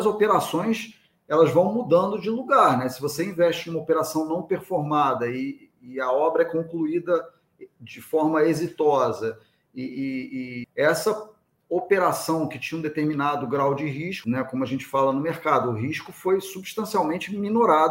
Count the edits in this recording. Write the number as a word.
two